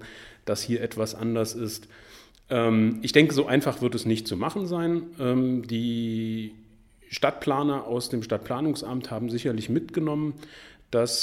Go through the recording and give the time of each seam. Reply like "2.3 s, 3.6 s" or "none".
none